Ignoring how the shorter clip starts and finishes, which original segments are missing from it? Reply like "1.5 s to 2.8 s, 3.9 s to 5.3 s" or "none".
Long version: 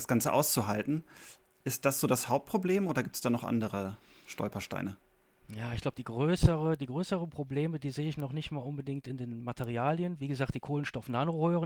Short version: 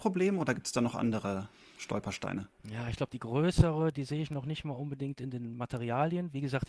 5.1 s to 5.4 s, 6.8 s to 7.8 s

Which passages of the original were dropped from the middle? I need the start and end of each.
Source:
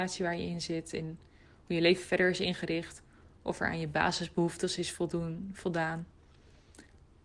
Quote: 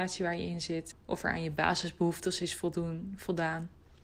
0.9 s to 3.3 s

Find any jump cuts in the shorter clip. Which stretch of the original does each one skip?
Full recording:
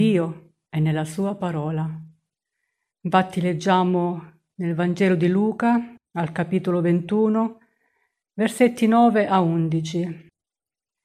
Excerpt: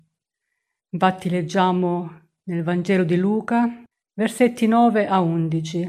6.0 s to 8.1 s

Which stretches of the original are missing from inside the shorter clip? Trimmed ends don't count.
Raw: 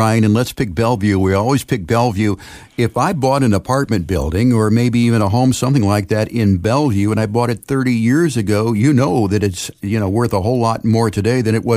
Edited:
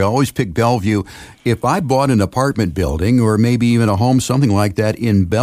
none

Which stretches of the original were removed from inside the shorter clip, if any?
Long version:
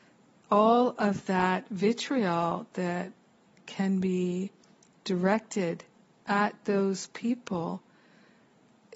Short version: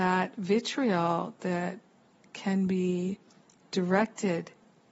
none

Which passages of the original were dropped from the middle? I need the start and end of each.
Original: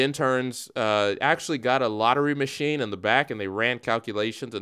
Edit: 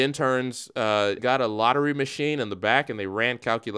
1.2 s to 1.6 s

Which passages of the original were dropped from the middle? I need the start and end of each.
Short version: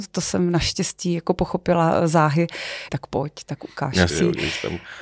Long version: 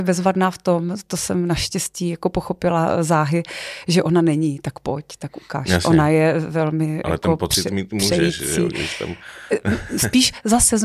3.8 s to 4.6 s, 5.8 s to 8.5 s

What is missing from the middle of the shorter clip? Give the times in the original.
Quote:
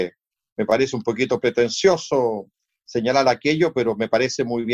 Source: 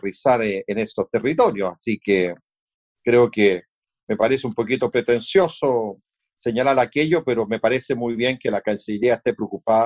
none

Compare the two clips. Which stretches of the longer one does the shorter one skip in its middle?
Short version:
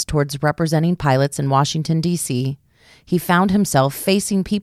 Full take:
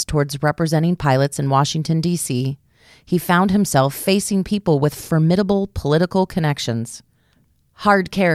none

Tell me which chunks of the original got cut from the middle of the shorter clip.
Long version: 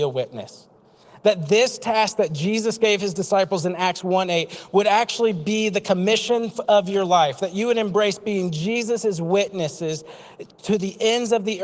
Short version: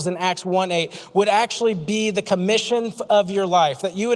none

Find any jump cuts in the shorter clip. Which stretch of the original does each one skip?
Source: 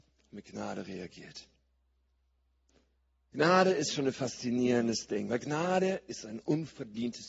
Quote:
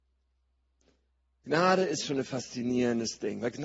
none

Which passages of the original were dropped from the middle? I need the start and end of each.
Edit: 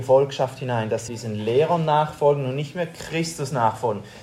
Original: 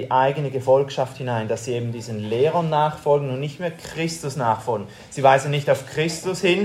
1.7 s to 1.9 s

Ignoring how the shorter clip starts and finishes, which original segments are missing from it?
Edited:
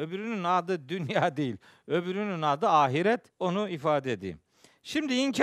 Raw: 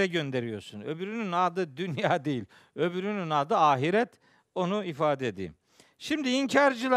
4.2 s to 4.5 s

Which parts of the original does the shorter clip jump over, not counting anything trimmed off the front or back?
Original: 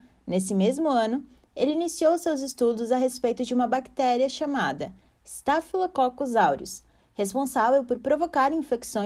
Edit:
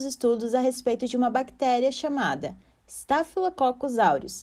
none

